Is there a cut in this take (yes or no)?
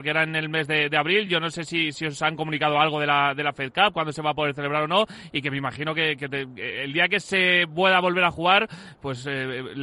no